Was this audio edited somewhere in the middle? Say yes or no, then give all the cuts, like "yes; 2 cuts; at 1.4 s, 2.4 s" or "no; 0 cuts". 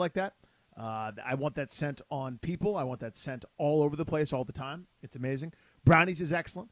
no; 0 cuts